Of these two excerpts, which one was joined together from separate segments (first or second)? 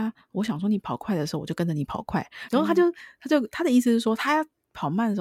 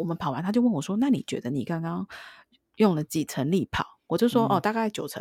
first